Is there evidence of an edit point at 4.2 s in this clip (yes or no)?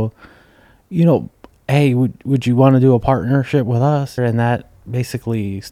yes